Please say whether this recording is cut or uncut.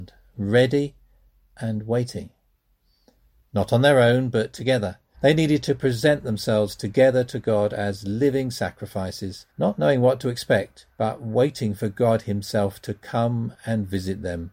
cut